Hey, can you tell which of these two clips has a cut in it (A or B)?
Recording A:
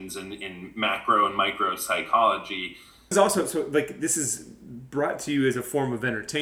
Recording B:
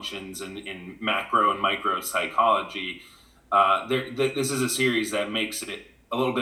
A